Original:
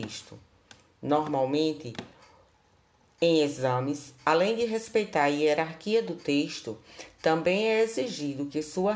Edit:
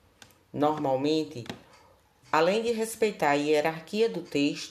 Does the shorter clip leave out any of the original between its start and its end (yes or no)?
yes